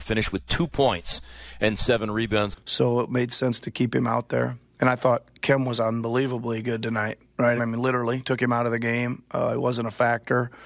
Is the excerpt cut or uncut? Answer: cut